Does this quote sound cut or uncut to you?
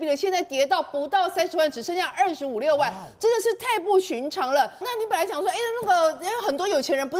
cut